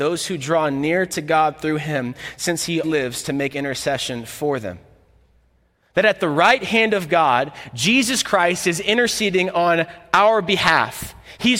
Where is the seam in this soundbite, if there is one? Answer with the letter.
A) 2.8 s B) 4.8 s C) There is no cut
A